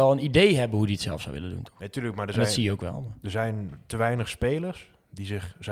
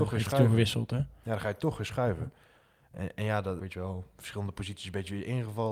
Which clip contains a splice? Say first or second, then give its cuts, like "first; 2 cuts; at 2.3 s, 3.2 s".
second; 1 cut; at 3.6 s